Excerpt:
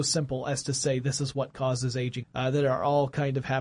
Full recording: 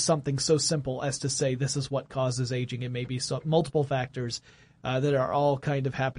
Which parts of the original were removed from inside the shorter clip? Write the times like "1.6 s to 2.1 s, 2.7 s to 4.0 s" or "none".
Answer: 2.8 s to 4.7 s